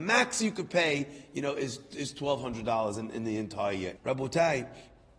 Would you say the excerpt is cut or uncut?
cut